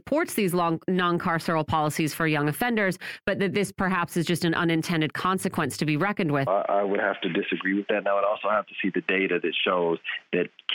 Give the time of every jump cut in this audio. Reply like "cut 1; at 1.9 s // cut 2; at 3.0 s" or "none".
cut 1; at 6.5 s

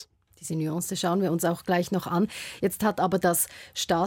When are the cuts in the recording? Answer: none

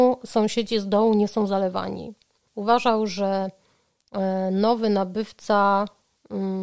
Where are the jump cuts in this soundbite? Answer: cut 1; at 2.5 s

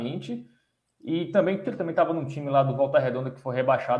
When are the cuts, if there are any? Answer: cut 1; at 1.6 s

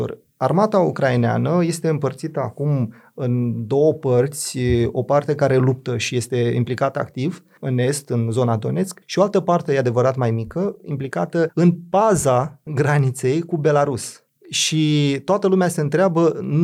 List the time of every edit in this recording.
none

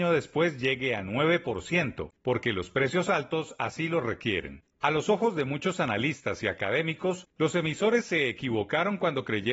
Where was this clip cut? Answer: none

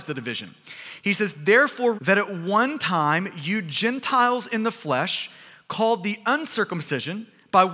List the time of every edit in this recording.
cut 1; at 2.0 s

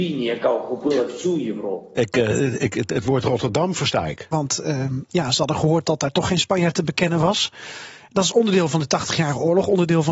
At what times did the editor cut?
cut 1; at 4.3 s

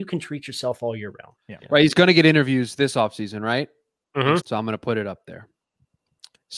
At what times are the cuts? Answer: cut 1; at 1.4 s // cut 2; at 4.4 s

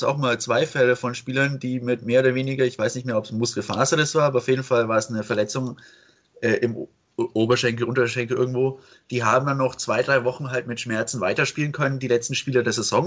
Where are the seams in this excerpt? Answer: none

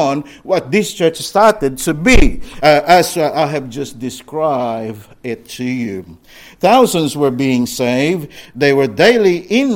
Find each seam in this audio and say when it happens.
none

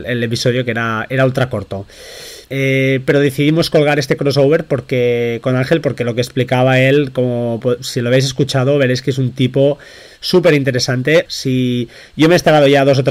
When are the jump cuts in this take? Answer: cut 1; at 2.4 s // cut 2; at 11.3 s

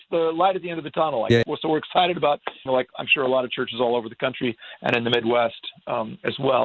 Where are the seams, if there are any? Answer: cut 1; at 1.4 s // cut 2; at 2.7 s

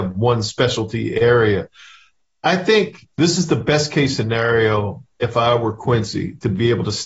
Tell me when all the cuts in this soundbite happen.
none

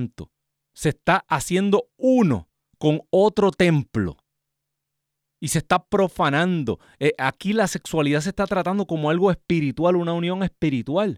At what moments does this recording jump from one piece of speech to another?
none

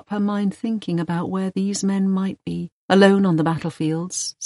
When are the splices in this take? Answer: cut 1; at 2.8 s

